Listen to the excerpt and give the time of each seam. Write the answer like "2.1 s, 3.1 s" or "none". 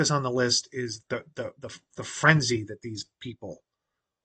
1.0 s